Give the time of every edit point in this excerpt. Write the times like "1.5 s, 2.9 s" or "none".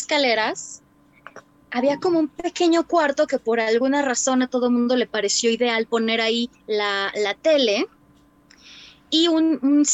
6.6 s